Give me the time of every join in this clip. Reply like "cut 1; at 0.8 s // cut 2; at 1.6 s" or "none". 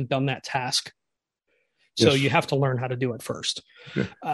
none

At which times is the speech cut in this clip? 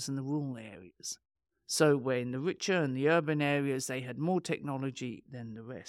none

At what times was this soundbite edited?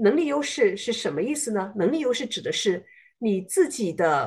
none

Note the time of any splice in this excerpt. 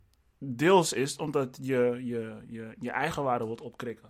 none

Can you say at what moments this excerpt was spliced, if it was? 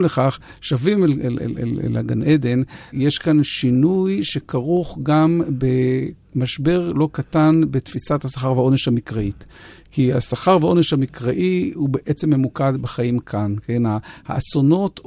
none

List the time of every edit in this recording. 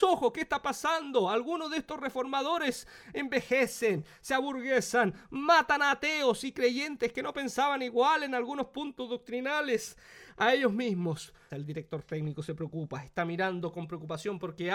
cut 1; at 11.5 s

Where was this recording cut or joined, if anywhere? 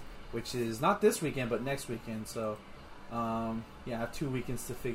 none

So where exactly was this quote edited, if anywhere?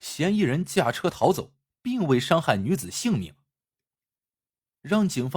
none

